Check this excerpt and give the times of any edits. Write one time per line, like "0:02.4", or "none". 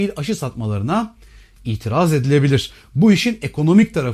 none

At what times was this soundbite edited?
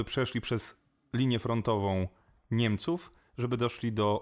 none

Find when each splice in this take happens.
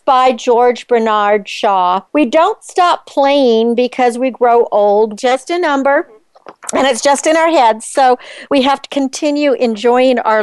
0:02.1
0:05.2

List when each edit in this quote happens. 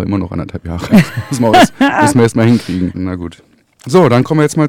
0:02.9

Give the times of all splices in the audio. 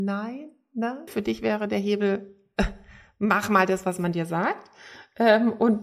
0:01.1

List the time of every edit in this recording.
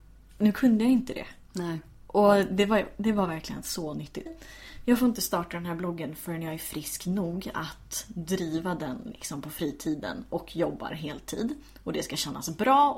0:04.3

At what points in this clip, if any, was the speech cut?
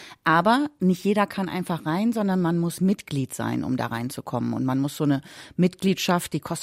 none

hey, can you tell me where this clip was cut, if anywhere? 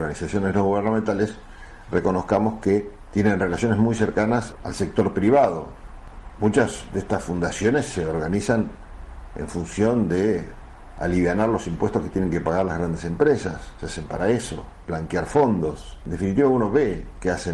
0:14.8

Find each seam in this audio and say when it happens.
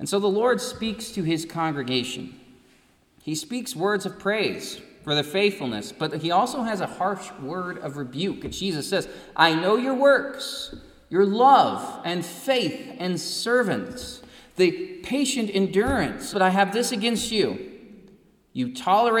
0:16.3

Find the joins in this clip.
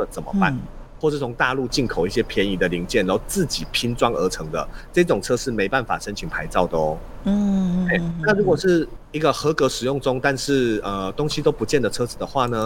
0:01.0

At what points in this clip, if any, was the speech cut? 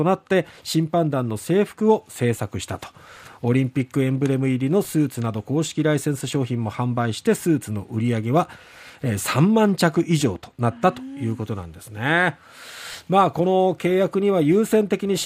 none

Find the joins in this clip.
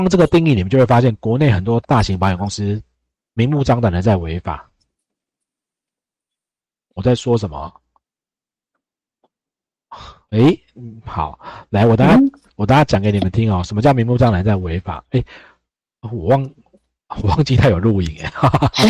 none

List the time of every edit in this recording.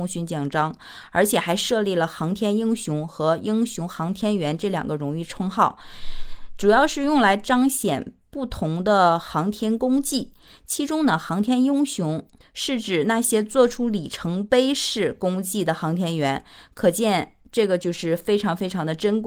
none

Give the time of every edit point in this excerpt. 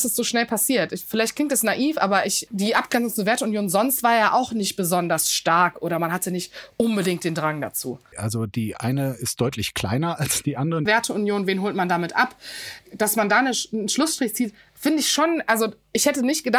0:02.5
0:08.1
0:10.9

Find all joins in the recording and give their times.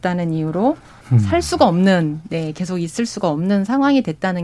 0:01.0

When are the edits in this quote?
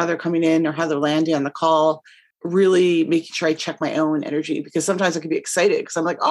0:02.3

